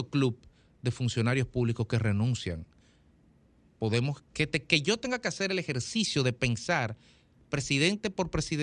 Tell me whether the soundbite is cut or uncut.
cut